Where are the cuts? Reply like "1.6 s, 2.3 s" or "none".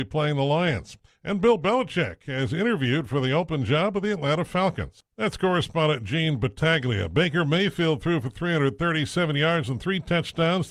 5.1 s